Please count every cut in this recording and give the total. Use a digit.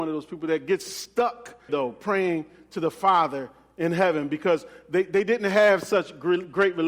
1